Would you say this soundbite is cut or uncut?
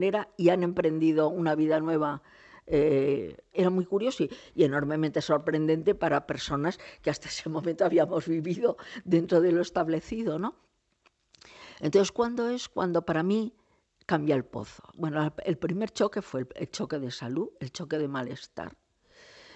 cut